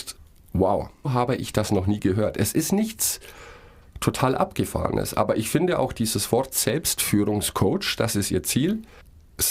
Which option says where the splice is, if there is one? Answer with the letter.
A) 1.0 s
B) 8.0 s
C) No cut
A